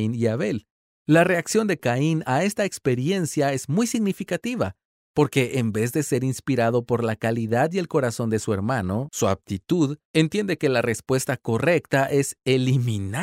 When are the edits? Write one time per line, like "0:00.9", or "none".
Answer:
0:01.0